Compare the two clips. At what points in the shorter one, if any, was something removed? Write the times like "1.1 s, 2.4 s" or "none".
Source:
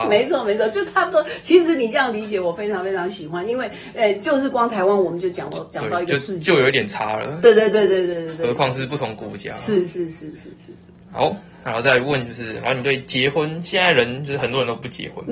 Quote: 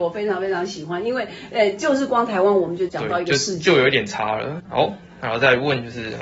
2.9 s, 4.6 s